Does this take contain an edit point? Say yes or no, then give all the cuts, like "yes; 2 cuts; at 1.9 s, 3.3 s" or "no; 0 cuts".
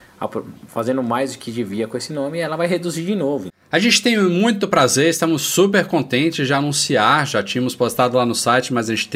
yes; 1 cut; at 3.5 s